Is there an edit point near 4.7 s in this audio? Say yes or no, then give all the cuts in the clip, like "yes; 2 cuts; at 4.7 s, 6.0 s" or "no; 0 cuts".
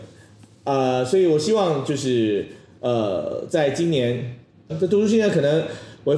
yes; 1 cut; at 4.7 s